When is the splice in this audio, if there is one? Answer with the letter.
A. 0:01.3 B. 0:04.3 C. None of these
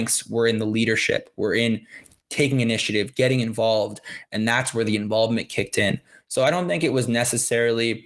B